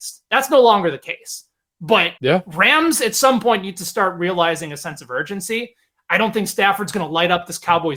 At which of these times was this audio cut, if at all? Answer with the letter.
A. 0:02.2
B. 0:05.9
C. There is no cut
A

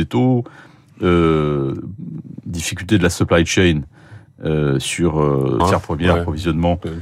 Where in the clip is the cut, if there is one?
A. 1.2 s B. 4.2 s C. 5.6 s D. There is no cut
C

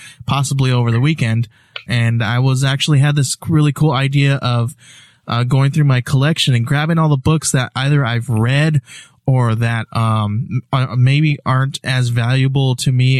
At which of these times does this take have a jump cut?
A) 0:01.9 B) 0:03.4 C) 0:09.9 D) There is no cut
A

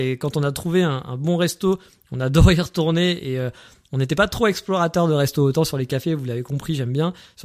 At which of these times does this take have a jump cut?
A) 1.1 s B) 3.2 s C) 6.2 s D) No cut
D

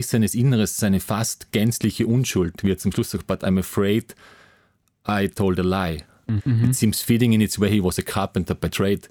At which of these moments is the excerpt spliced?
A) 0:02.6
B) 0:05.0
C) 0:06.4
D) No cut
C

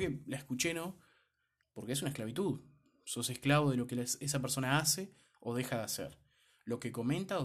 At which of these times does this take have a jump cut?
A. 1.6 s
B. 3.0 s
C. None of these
A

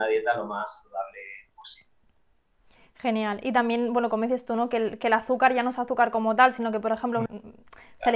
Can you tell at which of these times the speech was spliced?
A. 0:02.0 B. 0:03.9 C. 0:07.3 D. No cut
C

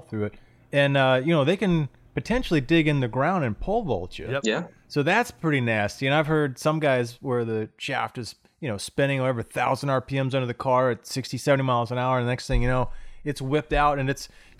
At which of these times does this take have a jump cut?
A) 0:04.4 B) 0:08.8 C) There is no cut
C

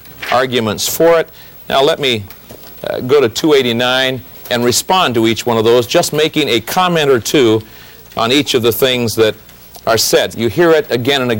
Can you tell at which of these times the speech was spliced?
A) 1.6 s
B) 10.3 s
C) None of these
B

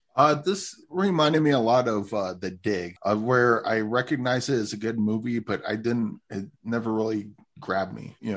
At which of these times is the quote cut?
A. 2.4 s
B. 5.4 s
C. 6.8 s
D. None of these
D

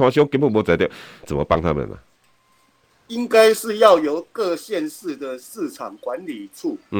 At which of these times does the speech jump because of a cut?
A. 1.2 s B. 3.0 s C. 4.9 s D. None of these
A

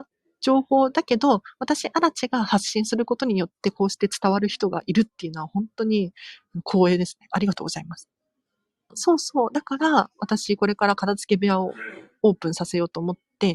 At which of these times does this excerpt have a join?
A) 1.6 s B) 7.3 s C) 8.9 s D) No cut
C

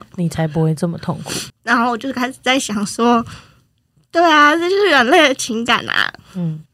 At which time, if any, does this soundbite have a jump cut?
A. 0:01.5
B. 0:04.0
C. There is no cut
A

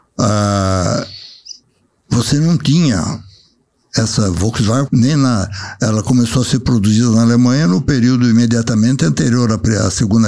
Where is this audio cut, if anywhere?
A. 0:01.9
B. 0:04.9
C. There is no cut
B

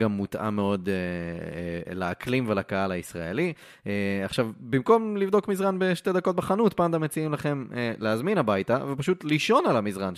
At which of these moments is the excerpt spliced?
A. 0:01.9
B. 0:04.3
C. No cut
A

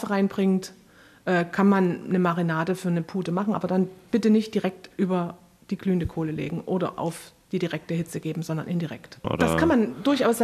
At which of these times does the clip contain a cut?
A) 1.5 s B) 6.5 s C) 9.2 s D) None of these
C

